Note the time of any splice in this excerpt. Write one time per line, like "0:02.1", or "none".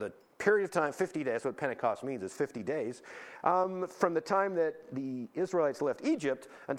none